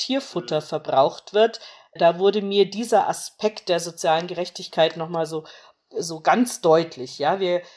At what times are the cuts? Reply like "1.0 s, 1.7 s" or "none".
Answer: none